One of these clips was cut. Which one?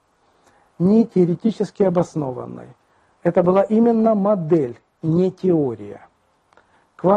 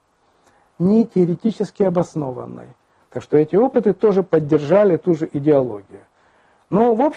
second; 1 cut; at 3.0 s

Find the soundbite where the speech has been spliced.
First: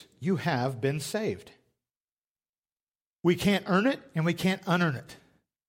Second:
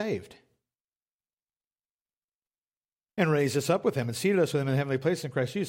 first; 1 cut; at 3.1 s

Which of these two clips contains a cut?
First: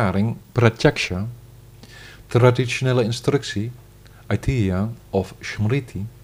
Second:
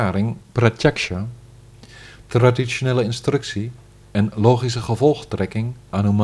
second; 1 cut; at 4.0 s

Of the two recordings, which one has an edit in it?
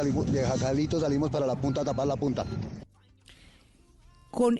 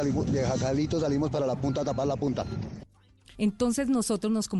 second; 1 cut; at 3.3 s

